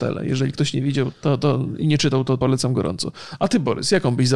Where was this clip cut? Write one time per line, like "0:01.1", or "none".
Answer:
0:01.1
0:02.4

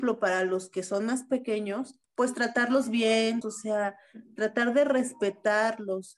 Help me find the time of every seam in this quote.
0:02.0
0:03.4

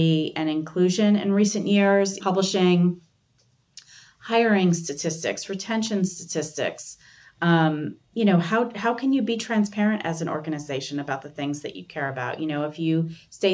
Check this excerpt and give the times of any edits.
0:02.2

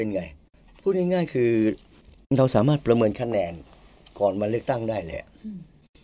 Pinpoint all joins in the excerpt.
none

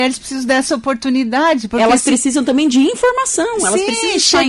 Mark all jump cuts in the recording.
none

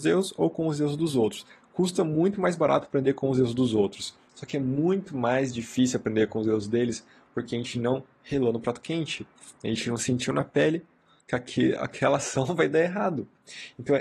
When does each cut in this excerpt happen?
none

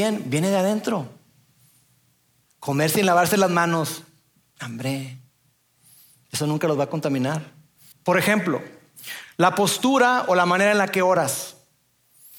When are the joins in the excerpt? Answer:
0:02.5
0:07.9

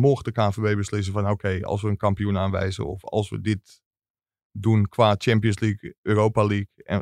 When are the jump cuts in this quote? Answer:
none

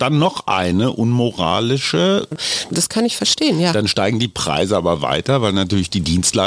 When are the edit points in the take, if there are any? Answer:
0:02.3

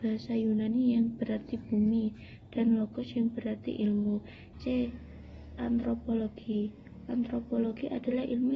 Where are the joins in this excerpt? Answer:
0:04.5

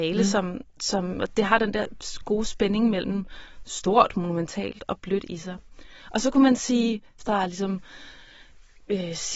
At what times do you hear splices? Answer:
0:07.2

